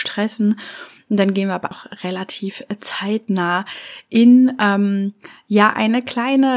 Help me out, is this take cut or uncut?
cut